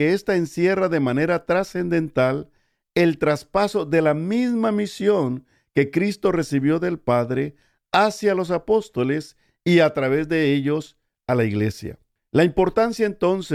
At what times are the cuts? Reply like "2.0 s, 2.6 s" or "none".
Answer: 12.2 s